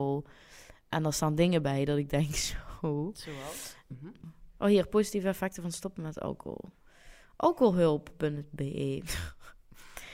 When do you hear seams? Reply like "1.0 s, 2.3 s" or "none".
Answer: 3.9 s

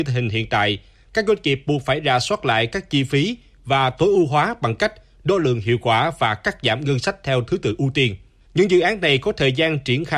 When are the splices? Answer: 8.4 s

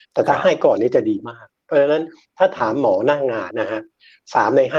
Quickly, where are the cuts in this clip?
3.5 s

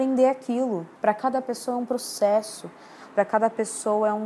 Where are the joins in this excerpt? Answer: 1.0 s

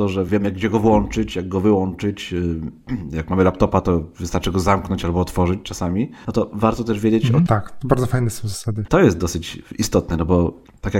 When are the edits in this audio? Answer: 7.5 s, 8.9 s

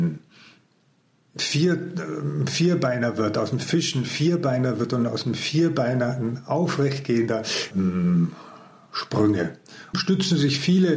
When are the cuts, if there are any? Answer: 7.7 s, 9.9 s

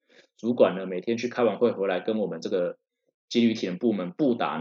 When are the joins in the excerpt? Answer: none

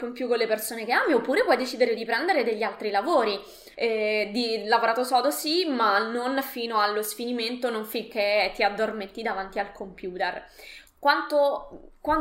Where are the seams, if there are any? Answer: 3.7 s, 10.9 s

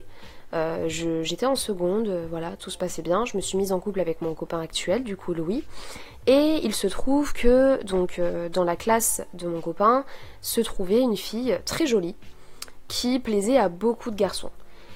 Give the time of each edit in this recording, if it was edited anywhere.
none

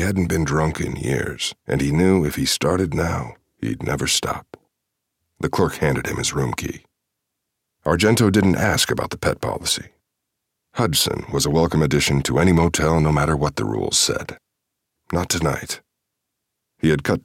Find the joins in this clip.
1.6 s, 5.2 s, 14.9 s

